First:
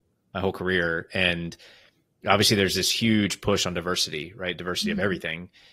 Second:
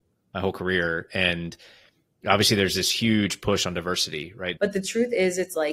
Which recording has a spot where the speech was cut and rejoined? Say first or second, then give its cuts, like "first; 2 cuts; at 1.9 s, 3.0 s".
second; 1 cut; at 4.6 s